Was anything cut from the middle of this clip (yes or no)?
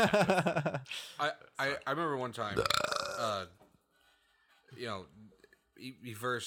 no